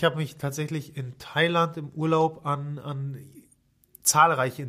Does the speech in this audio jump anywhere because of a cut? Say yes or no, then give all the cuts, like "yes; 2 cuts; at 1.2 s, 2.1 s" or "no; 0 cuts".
no; 0 cuts